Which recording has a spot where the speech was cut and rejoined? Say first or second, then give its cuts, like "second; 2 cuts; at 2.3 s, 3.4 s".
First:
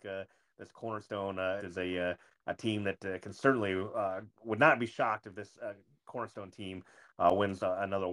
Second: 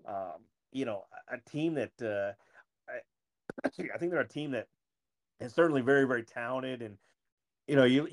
first; 2 cuts; at 1.6 s, 4.3 s